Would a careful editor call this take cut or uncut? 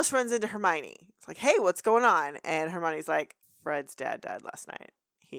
uncut